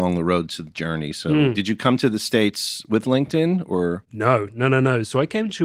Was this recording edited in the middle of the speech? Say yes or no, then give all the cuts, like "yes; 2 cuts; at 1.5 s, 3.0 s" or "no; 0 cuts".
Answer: no; 0 cuts